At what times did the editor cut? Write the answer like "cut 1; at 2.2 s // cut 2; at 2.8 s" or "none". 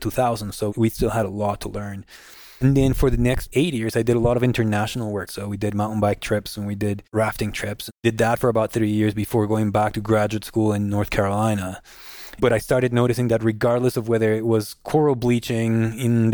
cut 1; at 5.3 s // cut 2; at 12.4 s